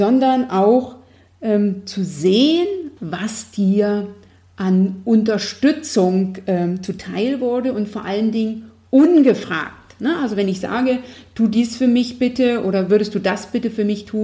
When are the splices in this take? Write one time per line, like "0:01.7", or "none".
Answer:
0:03.0